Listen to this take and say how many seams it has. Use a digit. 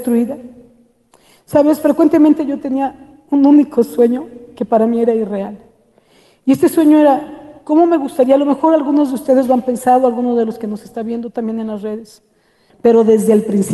1